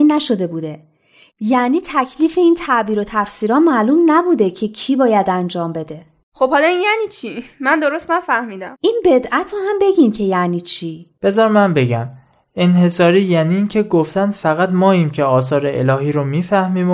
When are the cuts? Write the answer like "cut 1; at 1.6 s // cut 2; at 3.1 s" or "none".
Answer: cut 1; at 8.7 s // cut 2; at 11.2 s